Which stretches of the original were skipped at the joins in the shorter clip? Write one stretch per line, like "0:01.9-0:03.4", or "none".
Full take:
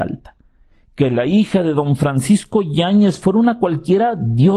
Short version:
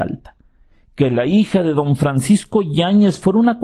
none